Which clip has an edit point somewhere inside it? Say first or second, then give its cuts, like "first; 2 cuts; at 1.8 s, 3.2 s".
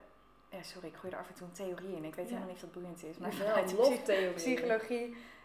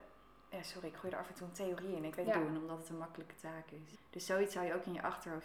second; 2 cuts; at 2.3 s, 3.9 s